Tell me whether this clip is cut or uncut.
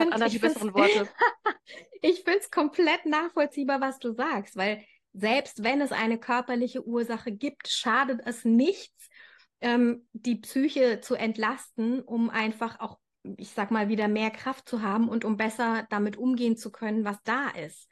uncut